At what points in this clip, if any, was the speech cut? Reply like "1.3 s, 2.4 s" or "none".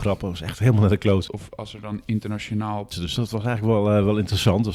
1.3 s, 2.9 s